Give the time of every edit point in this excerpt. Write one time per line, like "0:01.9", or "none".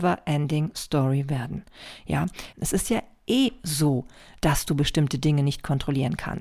0:02.5